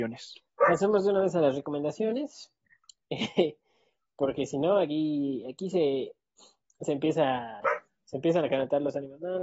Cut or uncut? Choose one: uncut